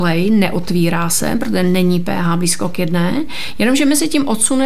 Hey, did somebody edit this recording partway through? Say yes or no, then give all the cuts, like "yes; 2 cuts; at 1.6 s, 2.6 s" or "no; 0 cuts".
no; 0 cuts